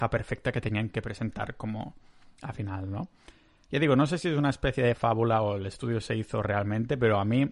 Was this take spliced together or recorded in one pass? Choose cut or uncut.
uncut